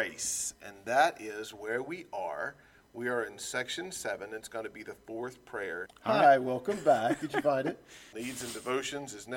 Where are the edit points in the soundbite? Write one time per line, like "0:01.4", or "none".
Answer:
0:05.9
0:08.1

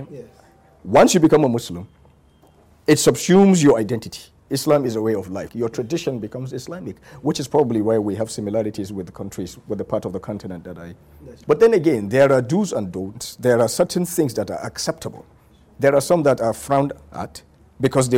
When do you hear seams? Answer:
0:05.5
0:11.4

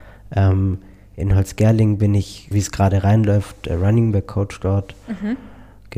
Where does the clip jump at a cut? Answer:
0:02.5

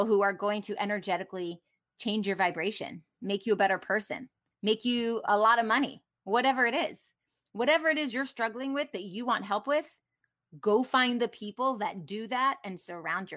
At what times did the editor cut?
0:04.5

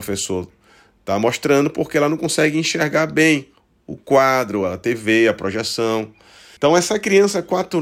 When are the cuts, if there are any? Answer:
0:06.6

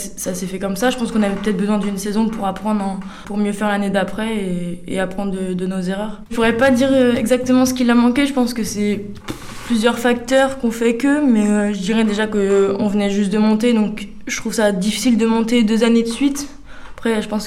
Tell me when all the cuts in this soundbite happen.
0:03.2
0:06.3

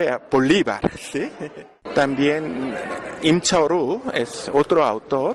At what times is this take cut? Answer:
0:01.9

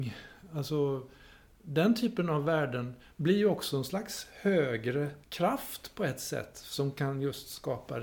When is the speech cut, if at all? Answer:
0:05.2

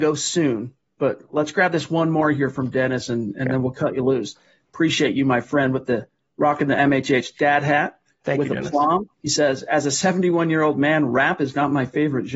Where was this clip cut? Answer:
0:09.1

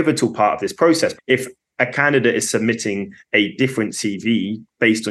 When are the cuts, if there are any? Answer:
0:01.2

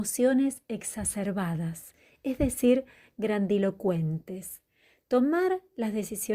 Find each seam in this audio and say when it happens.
none

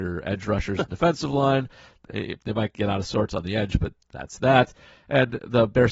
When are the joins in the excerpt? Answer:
none

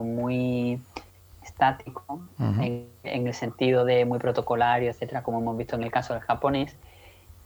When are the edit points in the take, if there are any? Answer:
none

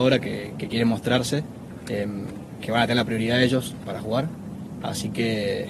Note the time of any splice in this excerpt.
0:03.8

